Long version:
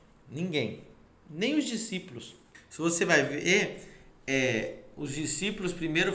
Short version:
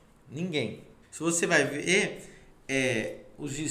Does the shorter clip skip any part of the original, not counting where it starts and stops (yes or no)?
yes